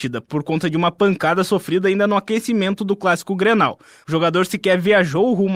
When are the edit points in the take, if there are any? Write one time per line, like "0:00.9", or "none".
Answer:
0:04.0